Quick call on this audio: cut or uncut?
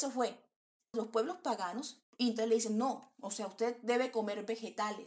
cut